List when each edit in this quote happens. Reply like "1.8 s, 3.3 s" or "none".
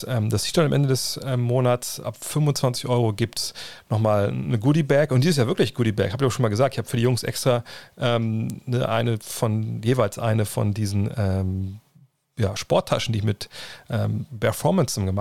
none

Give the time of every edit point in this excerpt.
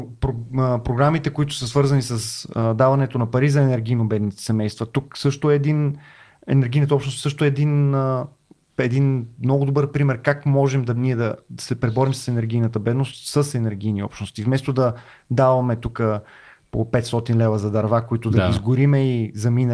none

